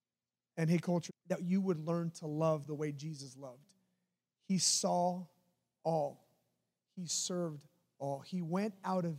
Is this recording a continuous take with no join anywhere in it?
no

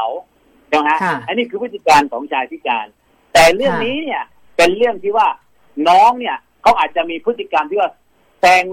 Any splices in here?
no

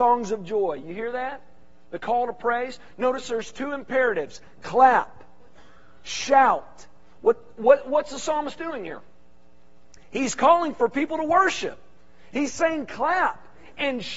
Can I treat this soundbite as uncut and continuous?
yes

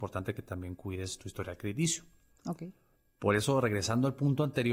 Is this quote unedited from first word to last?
no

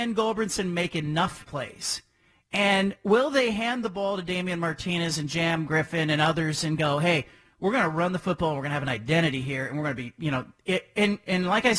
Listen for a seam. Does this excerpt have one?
no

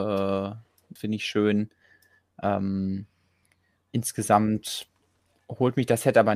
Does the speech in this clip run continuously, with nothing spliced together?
no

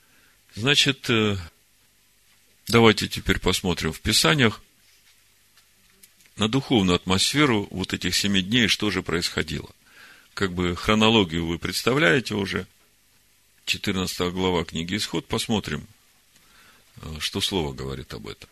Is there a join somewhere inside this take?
no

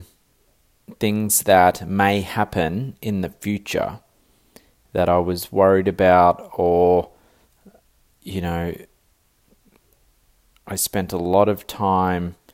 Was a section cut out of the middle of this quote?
no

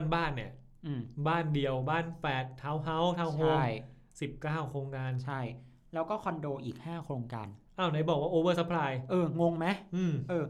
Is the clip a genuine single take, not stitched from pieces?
yes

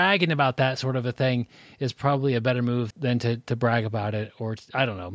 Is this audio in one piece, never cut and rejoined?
no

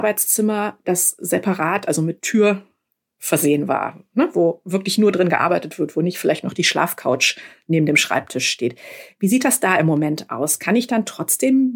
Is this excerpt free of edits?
yes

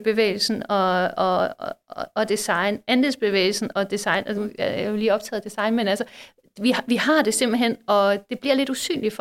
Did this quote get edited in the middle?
yes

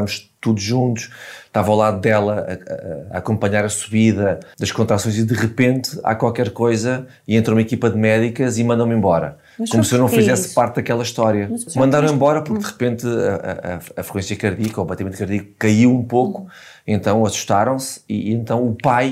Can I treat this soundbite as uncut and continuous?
yes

